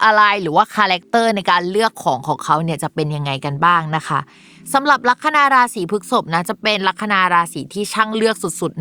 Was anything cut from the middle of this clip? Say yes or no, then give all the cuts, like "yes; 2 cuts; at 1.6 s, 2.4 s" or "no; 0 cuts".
no; 0 cuts